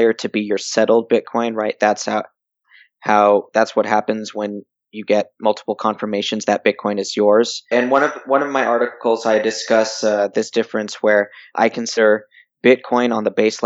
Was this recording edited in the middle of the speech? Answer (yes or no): yes